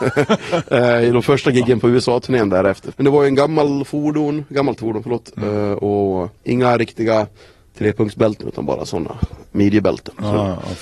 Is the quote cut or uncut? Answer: cut